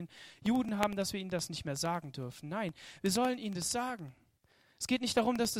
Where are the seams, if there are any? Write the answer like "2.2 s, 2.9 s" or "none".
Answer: none